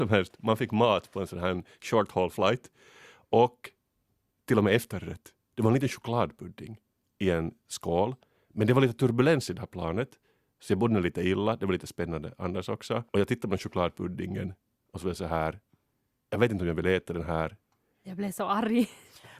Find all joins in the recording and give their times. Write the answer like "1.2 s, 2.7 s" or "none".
13.1 s, 17.9 s